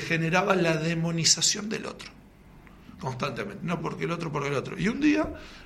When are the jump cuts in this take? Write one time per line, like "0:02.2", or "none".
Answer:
0:03.8

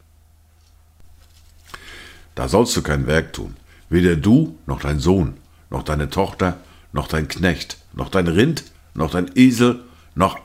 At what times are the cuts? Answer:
0:02.2
0:07.9

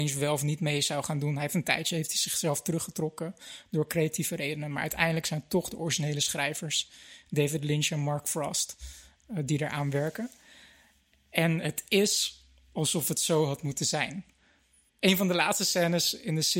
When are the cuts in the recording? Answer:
none

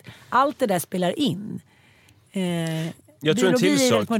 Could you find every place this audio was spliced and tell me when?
none

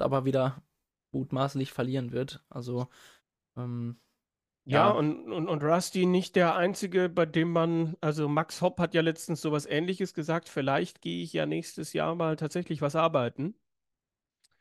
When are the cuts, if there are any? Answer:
none

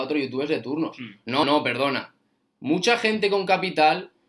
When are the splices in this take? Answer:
0:01.4

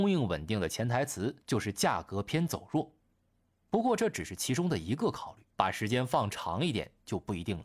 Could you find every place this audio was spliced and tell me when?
0:05.5

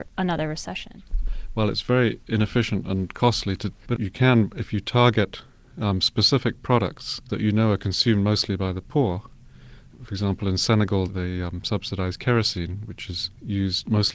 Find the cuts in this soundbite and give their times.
0:03.8

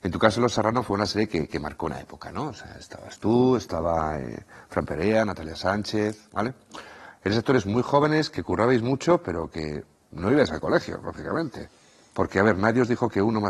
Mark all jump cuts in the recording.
none

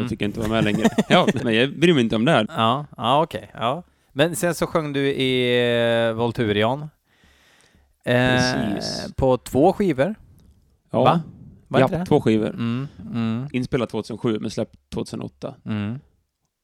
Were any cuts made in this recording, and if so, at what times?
0:01.4
0:02.5
0:13.0

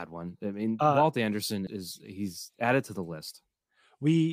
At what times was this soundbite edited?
0:01.7

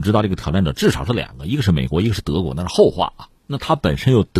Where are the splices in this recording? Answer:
0:03.4

